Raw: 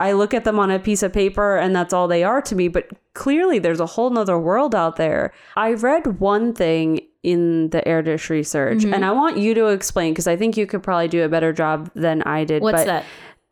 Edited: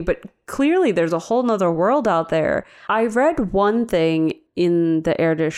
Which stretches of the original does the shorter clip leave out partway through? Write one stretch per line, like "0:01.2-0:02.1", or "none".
none